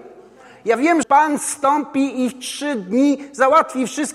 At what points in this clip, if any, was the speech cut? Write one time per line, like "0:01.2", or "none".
0:01.0

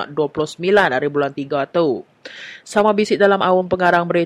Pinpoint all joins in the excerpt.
none

